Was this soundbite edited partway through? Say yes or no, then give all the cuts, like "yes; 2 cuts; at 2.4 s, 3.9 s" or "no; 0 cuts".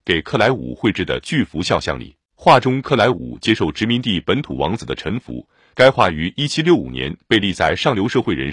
yes; 1 cut; at 2.2 s